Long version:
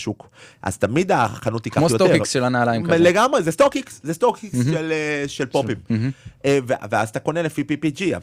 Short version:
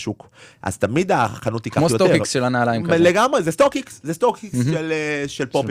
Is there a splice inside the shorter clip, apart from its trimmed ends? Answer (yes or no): no